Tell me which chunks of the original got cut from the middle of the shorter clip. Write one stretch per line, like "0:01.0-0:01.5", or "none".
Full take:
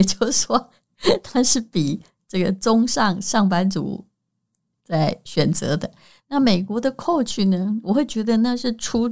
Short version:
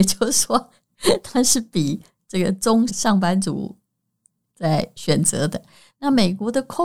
0:02.9-0:03.2